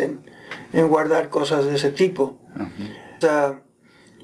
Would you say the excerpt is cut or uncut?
cut